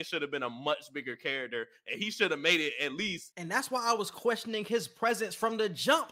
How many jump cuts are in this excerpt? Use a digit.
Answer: 1